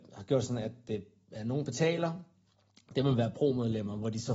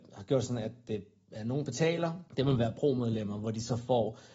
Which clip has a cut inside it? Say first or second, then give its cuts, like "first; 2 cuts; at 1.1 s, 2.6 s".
second; 1 cut; at 2.3 s